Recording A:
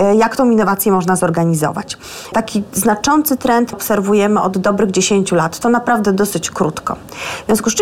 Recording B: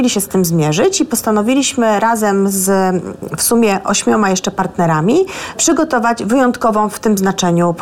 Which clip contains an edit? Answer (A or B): A